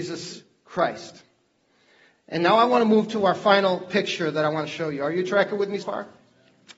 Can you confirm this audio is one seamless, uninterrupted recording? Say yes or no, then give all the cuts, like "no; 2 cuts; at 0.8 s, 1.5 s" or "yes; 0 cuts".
no; 1 cut; at 5.8 s